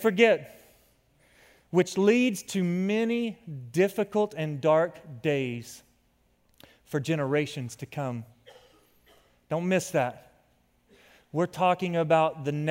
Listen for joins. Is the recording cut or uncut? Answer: uncut